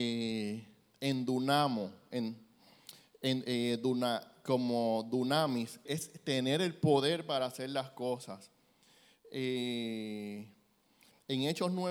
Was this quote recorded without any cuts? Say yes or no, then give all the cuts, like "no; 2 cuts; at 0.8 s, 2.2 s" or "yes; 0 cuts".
no; 1 cut; at 5.9 s